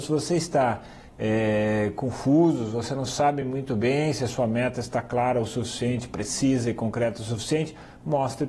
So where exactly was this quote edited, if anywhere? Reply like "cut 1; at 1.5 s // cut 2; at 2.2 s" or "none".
none